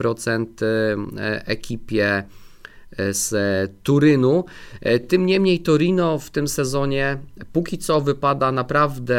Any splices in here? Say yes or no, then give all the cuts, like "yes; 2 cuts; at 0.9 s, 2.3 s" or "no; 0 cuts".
no; 0 cuts